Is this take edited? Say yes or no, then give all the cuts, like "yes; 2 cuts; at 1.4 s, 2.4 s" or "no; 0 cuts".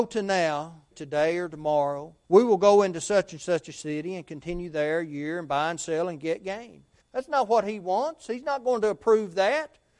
yes; 3 cuts; at 0.9 s, 2.2 s, 7.0 s